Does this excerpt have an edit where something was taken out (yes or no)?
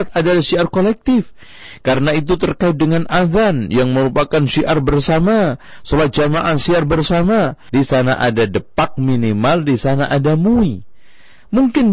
yes